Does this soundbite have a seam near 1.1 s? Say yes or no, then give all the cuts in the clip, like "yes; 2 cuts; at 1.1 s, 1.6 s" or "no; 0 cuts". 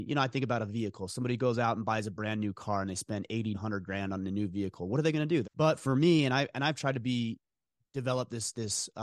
no; 2 cuts; at 3.5 s, 5.4 s